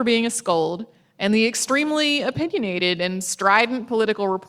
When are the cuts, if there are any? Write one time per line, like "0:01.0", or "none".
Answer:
none